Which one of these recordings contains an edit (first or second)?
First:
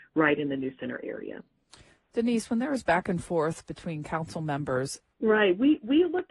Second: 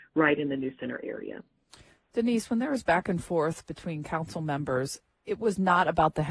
first